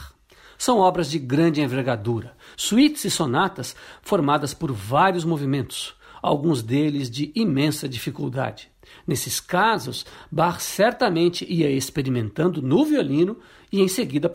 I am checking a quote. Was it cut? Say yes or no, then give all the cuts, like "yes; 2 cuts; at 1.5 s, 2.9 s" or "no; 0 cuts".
no; 0 cuts